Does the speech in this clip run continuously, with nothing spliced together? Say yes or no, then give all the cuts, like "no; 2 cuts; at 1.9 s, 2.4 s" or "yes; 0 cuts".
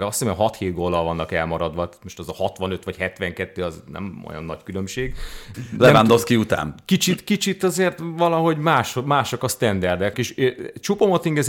no; 2 cuts; at 5.5 s, 10.1 s